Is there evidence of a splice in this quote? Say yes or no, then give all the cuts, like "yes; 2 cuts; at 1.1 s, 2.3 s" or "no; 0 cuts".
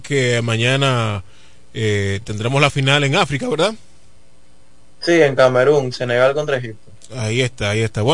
no; 0 cuts